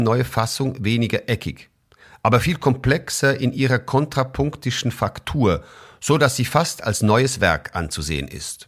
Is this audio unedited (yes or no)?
yes